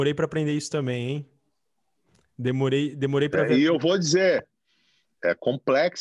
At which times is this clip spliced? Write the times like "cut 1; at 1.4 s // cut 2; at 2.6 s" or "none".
none